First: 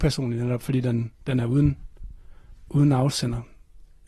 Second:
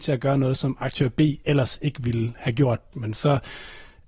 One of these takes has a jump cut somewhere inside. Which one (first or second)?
second